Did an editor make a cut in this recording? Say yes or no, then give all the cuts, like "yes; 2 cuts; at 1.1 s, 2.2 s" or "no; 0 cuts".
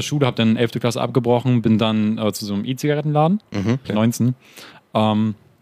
yes; 1 cut; at 3.8 s